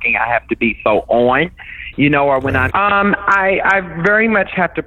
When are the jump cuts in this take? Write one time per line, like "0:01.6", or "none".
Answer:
0:02.7